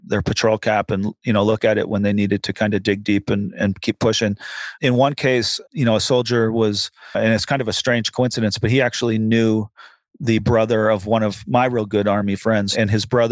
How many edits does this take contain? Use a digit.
1